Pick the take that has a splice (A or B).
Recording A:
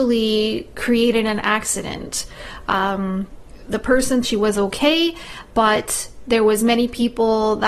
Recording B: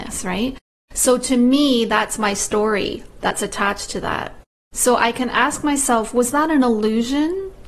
A